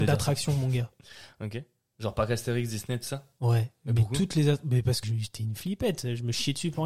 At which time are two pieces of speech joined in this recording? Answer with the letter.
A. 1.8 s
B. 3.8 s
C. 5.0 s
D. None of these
C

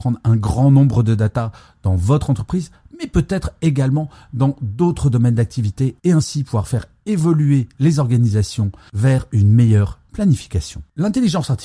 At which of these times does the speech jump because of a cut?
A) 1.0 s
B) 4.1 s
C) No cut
C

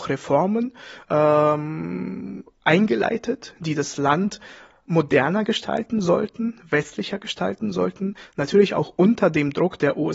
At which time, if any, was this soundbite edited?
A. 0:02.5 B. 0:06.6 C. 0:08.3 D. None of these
D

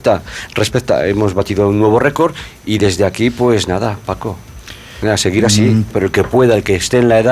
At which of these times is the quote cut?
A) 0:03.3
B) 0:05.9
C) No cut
B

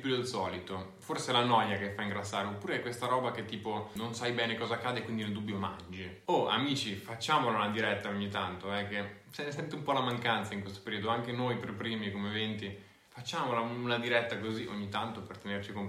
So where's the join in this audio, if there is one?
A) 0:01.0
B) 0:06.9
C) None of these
C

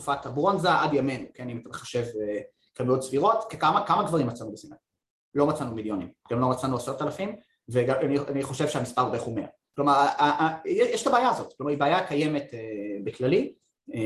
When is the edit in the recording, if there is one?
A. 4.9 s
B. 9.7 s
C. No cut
C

